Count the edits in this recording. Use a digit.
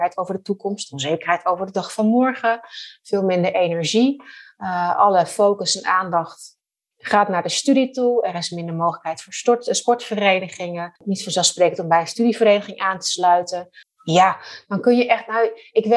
1